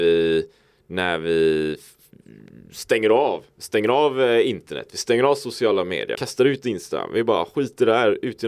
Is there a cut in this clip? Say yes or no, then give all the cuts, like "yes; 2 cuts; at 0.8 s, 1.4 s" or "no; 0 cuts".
yes; 1 cut; at 6.1 s